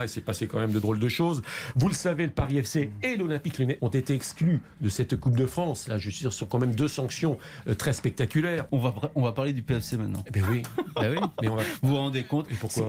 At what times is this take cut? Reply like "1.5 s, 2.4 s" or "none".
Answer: 3.8 s, 8.7 s